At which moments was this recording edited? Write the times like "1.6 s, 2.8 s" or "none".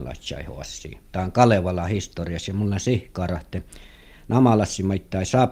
none